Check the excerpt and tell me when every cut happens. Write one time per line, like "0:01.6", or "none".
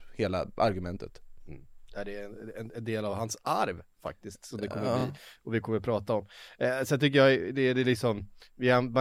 none